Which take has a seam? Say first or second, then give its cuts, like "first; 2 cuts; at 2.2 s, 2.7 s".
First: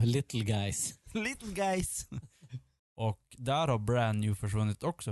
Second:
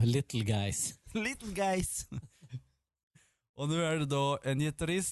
first; 1 cut; at 2.8 s